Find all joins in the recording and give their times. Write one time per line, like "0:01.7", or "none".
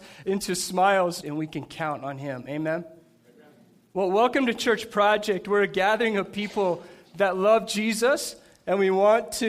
0:01.2